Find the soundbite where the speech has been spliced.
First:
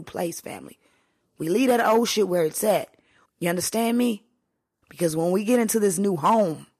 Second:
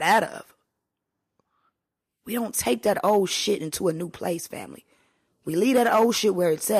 first; 2 cuts; at 3.2 s, 4.8 s

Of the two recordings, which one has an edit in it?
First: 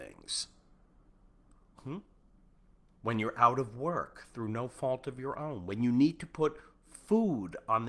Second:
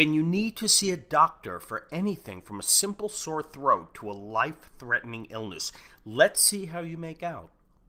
first; 1 cut; at 1.8 s

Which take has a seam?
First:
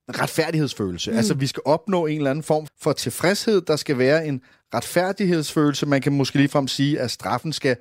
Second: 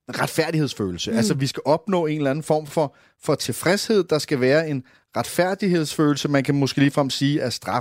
first; 1 cut; at 2.7 s

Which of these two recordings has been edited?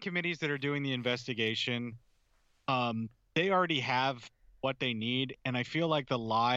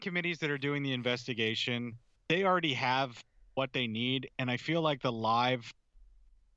second; 1 cut; at 2.2 s

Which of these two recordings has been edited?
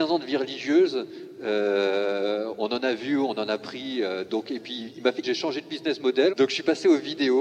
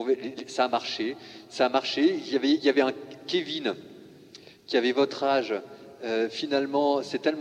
first; 2 cuts; at 5.2 s, 6.3 s

